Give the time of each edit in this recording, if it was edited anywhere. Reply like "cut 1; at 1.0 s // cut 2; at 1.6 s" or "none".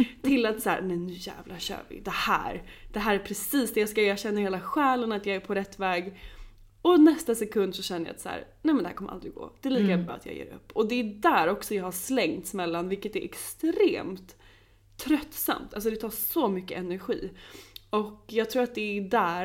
none